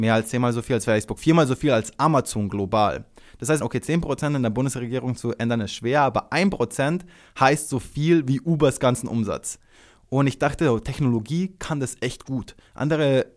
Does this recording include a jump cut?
yes; 1 cut; at 3.6 s

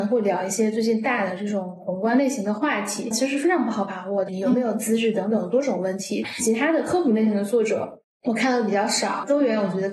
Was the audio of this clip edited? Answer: yes; 3 cuts; at 3.1 s, 4.3 s, 6.2 s

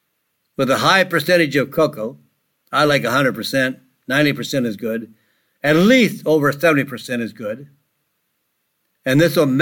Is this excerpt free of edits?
yes; 0 cuts

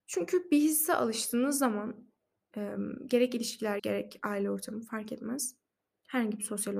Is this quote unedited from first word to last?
no; 1 cut; at 3.8 s

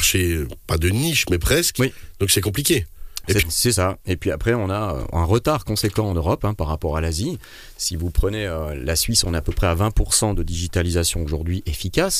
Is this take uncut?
no; 1 cut; at 3.4 s

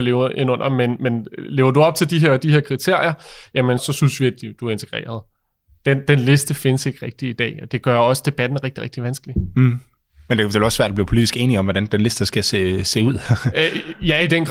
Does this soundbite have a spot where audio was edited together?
yes; 1 cut; at 3.8 s

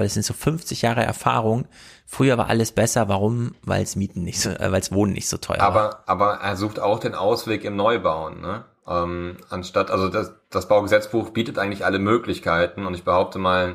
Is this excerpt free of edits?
yes; 0 cuts

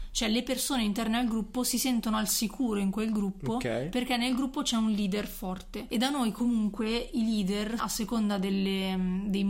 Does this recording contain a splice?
yes; 1 cut; at 7.8 s

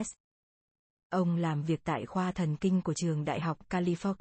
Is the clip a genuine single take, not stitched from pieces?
no; 1 cut; at 1.0 s

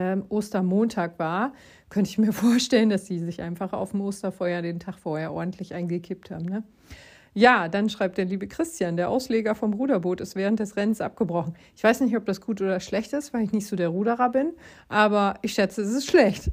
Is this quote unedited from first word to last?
yes; 0 cuts

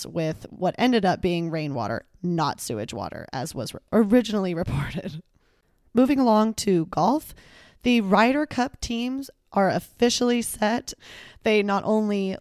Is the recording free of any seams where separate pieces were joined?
no; 1 cut; at 11.0 s

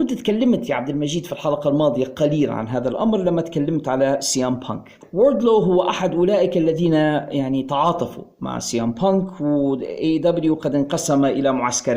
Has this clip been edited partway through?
no; 0 cuts

